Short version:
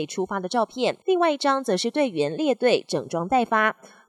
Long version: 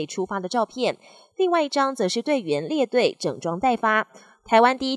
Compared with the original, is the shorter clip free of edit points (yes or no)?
no